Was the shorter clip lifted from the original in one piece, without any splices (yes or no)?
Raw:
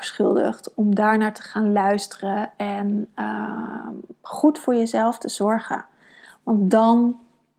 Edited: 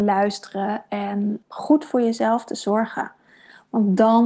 no